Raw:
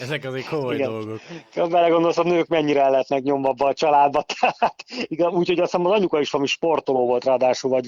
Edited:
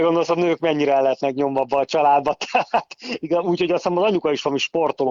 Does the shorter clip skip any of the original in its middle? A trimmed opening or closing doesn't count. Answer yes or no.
no